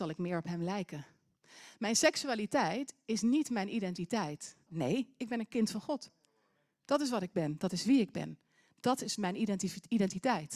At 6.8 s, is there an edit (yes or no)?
no